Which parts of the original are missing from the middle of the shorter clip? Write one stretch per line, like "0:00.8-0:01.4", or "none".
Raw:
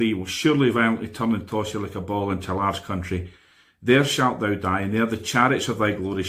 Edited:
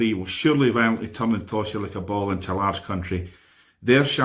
none